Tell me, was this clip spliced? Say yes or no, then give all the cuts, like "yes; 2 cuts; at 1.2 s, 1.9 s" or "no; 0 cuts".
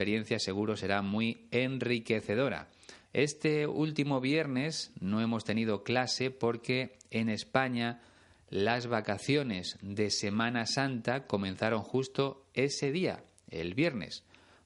yes; 1 cut; at 3.1 s